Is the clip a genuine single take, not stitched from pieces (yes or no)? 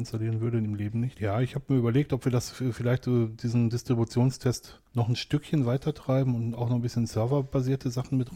no